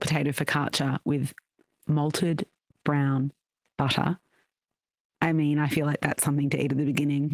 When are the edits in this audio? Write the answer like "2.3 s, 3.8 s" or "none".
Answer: none